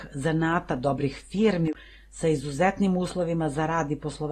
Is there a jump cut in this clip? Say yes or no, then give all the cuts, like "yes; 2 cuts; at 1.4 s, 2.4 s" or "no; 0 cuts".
no; 0 cuts